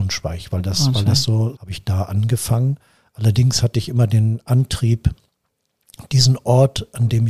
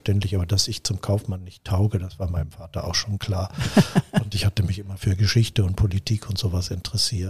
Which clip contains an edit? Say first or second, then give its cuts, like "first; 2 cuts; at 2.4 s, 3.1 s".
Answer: first; 1 cut; at 1.5 s